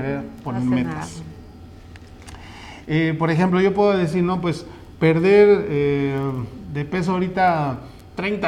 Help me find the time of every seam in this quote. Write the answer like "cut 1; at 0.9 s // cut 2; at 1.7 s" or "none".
cut 1; at 2.8 s

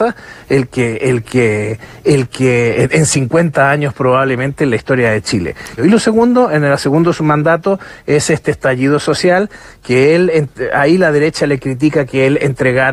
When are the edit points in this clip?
cut 1; at 5.8 s

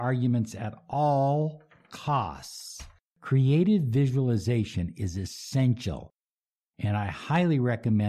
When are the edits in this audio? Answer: cut 1; at 3.1 s

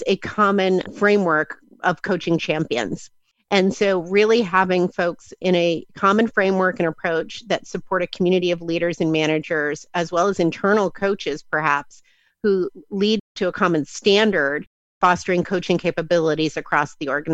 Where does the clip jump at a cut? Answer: none

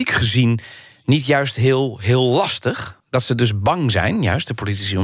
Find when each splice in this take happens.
cut 1; at 3.0 s

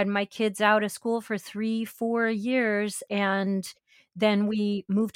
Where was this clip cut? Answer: none

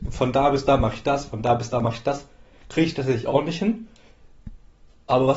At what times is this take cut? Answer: none

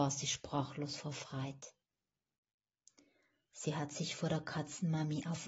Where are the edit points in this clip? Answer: none

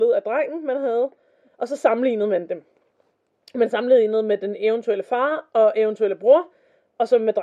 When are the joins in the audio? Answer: none

